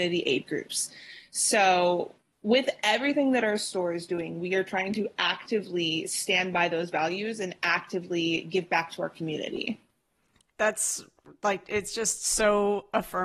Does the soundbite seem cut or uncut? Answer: uncut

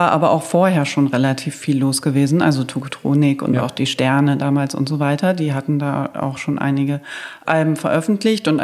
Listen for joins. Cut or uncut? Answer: uncut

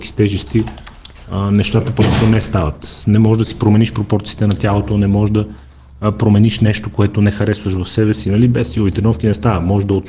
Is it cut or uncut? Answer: uncut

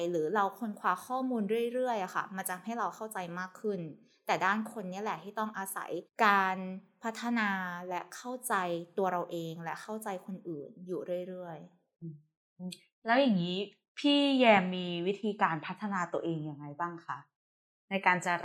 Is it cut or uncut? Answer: uncut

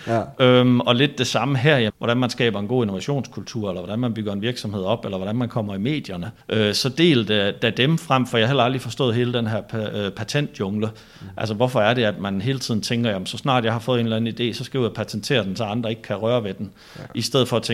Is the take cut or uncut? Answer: cut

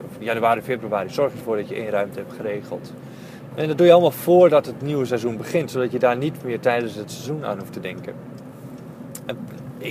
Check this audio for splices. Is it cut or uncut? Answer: cut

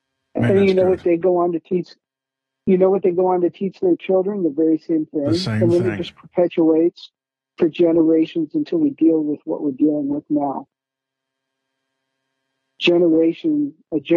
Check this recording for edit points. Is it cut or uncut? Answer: uncut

